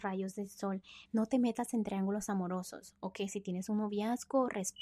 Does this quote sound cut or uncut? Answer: cut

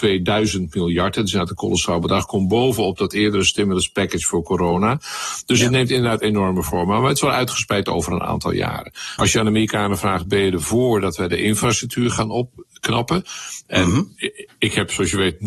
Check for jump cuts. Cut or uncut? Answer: cut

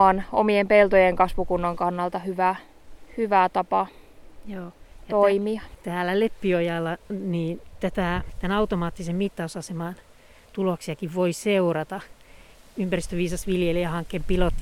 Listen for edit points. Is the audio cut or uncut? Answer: uncut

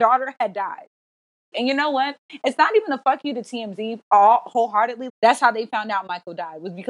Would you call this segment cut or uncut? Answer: cut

